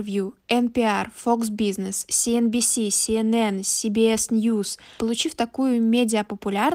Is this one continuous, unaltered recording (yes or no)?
no